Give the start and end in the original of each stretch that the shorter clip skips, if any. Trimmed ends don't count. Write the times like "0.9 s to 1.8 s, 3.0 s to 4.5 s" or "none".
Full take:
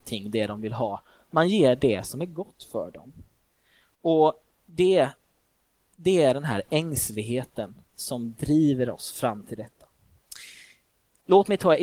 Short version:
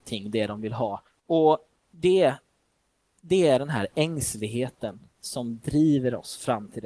1.1 s to 3.8 s